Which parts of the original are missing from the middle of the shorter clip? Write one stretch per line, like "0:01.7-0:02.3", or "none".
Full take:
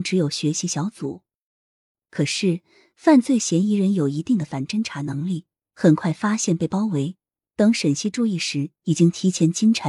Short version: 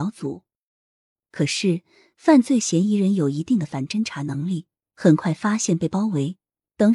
none